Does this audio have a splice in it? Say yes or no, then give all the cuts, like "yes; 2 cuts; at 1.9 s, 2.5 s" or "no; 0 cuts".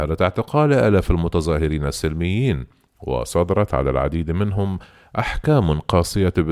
no; 0 cuts